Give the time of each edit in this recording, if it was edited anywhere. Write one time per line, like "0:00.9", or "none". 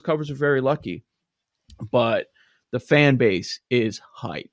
none